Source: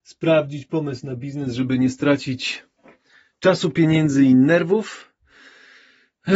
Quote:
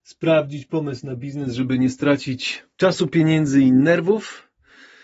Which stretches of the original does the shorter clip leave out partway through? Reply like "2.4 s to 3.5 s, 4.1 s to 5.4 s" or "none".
2.7 s to 3.4 s